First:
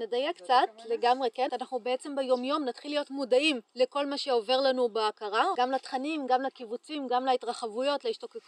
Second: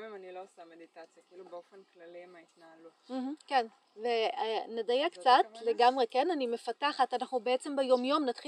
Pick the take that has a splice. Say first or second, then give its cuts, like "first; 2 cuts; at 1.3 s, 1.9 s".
first; 3 cuts; at 1.5 s, 3.7 s, 5.5 s